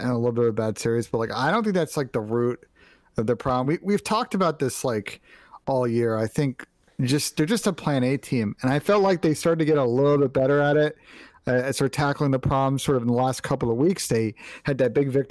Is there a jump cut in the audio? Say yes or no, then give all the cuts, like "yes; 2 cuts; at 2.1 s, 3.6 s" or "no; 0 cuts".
no; 0 cuts